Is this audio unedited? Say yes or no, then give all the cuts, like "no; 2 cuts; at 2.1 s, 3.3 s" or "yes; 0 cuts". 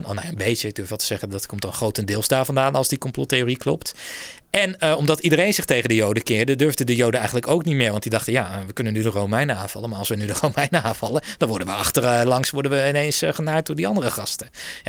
yes; 0 cuts